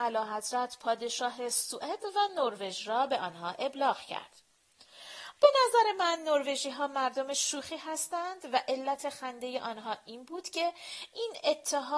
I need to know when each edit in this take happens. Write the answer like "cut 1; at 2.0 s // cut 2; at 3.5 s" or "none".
cut 1; at 5.3 s